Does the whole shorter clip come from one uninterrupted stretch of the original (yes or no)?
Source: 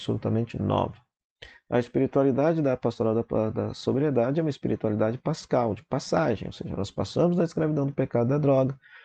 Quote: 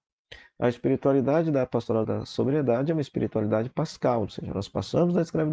no